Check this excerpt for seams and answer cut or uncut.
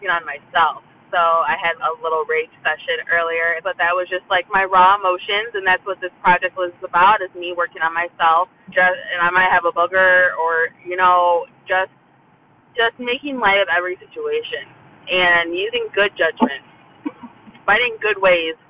cut